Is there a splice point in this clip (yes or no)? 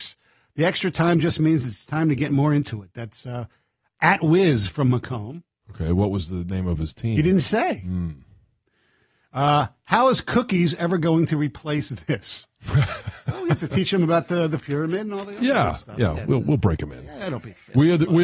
no